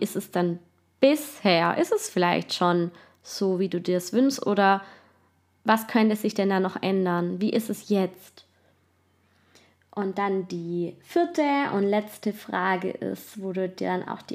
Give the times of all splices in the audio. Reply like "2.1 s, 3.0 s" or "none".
none